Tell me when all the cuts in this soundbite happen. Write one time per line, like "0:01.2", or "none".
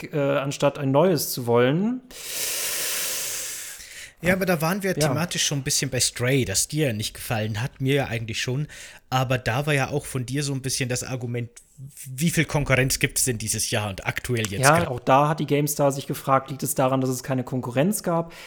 0:14.8